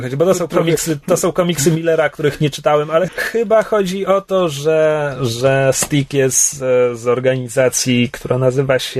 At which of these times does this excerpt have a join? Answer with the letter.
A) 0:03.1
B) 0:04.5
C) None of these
A